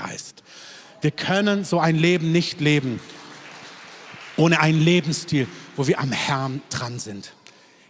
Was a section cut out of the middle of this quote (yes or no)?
no